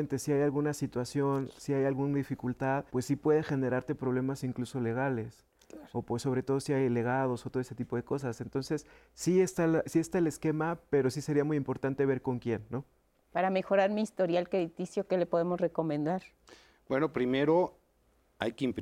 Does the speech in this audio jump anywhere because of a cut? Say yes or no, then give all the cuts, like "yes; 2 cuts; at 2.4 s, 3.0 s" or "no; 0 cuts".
yes; 1 cut; at 2.9 s